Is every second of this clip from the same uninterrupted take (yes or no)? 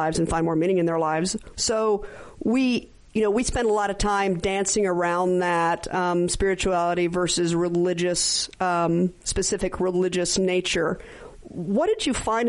no